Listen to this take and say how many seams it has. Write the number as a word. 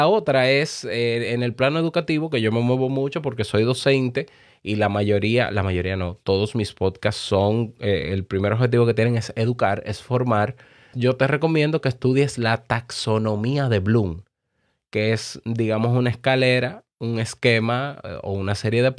one